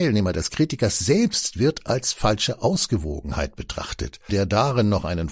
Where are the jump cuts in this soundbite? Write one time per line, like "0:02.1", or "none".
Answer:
0:04.3